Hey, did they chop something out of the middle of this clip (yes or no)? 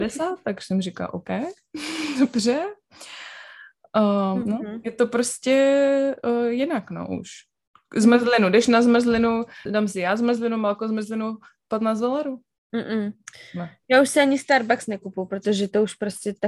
yes